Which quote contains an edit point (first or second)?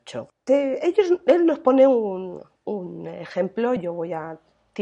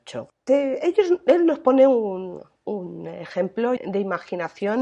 second